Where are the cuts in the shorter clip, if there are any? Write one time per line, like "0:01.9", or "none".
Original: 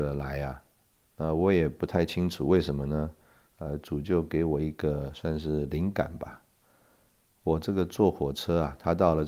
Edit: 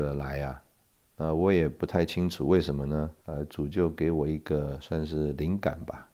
0:03.2